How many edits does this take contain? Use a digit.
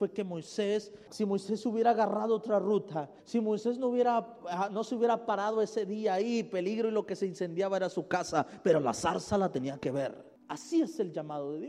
1